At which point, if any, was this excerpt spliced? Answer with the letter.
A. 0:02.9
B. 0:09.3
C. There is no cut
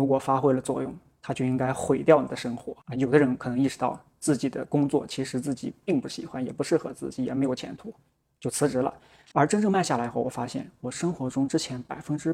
B